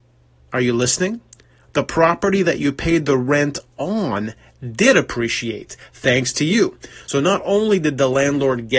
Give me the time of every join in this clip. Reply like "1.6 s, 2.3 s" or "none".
none